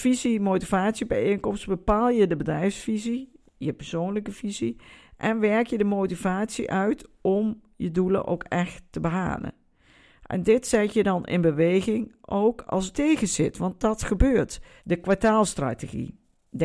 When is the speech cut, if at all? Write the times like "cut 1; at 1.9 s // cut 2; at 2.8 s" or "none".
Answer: cut 1; at 12.9 s // cut 2; at 14.8 s